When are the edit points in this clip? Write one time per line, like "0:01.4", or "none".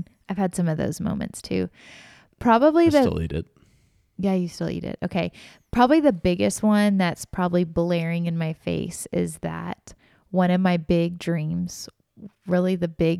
none

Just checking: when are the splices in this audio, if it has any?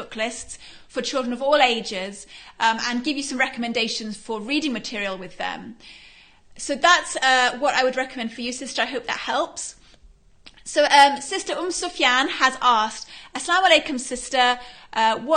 none

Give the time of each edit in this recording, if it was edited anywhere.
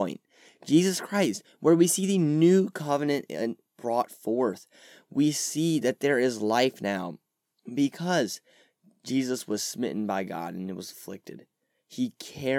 none

